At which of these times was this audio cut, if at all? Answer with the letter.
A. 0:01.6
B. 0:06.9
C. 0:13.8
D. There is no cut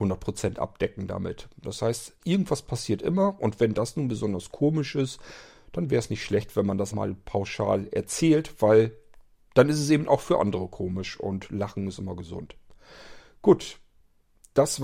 B